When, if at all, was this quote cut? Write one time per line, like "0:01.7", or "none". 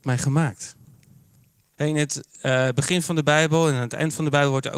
0:01.7

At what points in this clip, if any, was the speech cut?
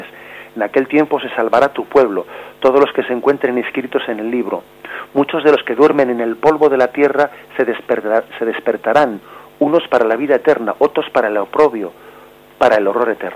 none

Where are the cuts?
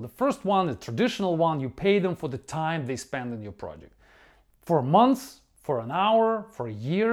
none

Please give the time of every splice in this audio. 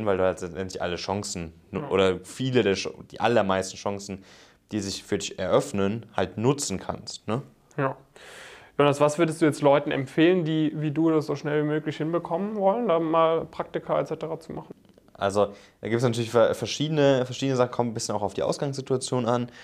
none

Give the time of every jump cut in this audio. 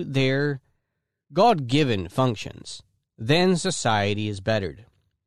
none

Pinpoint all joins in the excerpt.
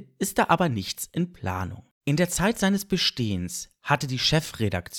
0:02.0

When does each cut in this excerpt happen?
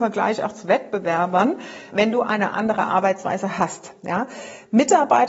0:01.9

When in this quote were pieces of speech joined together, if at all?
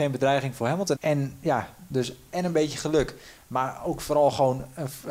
0:01.0

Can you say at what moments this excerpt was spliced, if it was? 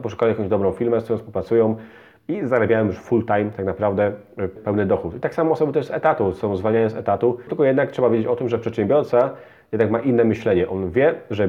0:04.6
0:07.5

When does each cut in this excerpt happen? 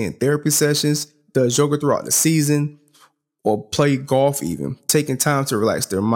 none

